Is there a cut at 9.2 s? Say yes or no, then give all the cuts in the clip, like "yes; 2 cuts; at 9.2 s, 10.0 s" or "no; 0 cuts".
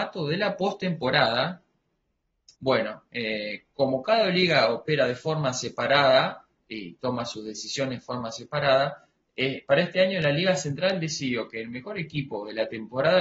no; 1 cut; at 2.5 s